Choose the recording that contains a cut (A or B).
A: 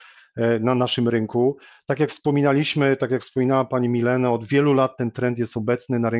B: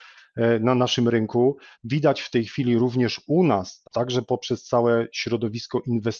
B